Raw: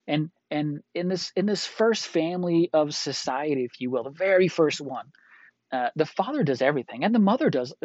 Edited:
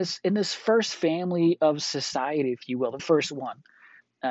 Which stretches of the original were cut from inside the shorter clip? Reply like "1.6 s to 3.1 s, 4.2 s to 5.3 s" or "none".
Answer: 4.1 s to 4.5 s